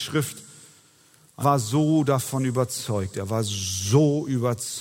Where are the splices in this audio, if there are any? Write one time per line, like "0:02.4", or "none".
0:01.4